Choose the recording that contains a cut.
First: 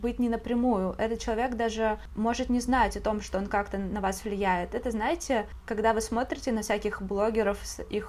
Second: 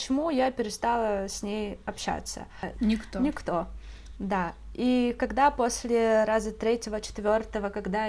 second; 1 cut; at 2.7 s

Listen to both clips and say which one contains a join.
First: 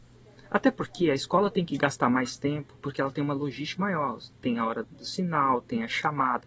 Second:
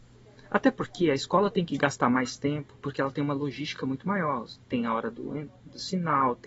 first; 2 cuts; at 3.8 s, 4.8 s

